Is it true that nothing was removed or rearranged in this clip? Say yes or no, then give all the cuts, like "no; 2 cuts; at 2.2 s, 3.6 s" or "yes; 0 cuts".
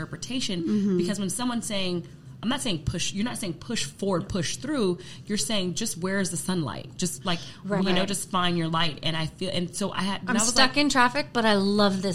no; 1 cut; at 7.8 s